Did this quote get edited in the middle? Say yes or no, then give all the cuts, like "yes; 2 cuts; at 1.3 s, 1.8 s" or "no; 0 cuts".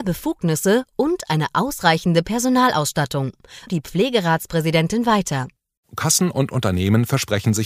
yes; 2 cuts; at 3.7 s, 5.8 s